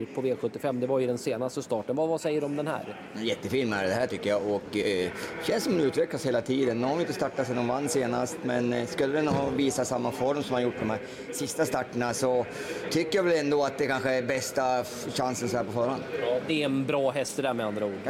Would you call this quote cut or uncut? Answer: uncut